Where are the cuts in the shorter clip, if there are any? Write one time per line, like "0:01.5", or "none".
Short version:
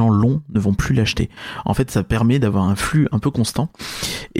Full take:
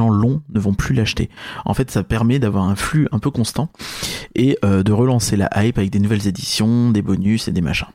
none